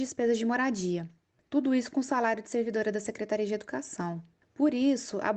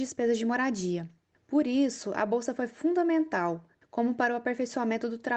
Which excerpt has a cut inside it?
second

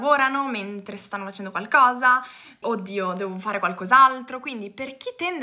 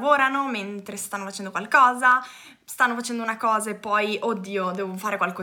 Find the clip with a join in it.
first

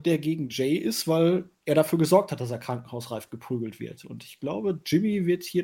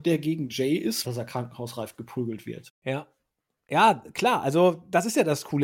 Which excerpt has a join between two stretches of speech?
second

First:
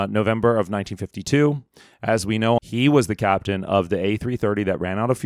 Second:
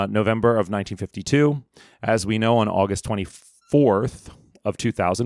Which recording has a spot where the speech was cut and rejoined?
first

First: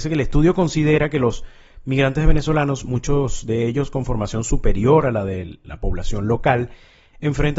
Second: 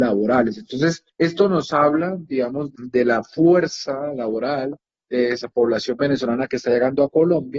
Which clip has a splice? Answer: second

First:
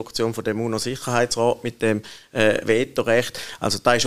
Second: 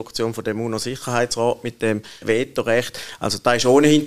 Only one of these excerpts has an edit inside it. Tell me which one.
second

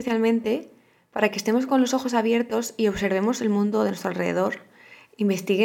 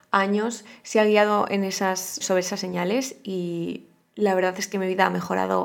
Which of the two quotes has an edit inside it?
second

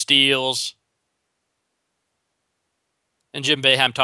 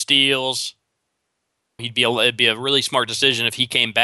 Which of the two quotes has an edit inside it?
second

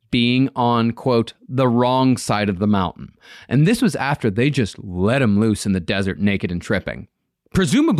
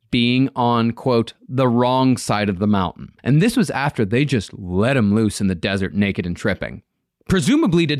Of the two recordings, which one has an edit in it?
second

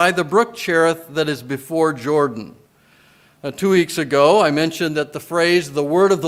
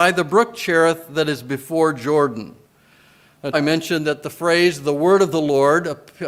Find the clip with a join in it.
second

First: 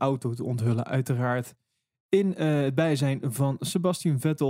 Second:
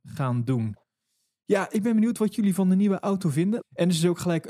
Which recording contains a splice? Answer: second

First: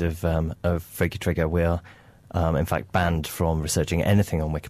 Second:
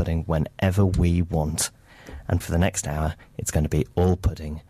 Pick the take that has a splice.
second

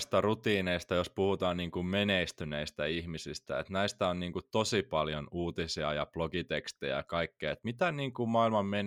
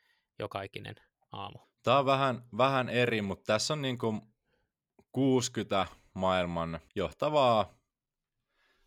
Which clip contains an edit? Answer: second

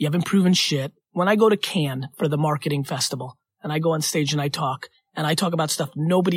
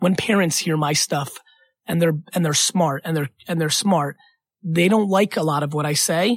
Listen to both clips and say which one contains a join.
first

